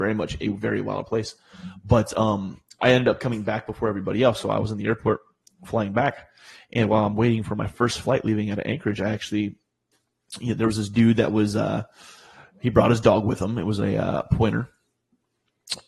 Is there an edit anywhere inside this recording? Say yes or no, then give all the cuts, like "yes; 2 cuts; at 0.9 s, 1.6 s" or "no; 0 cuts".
no; 0 cuts